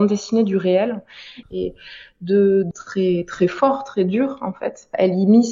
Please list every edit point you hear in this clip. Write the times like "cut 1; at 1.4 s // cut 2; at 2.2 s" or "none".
cut 1; at 1.4 s // cut 2; at 2.7 s